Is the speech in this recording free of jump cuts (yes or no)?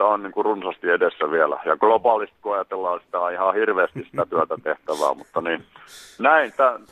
yes